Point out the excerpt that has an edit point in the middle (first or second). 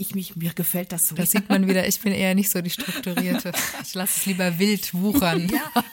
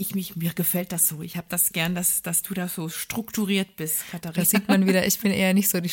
first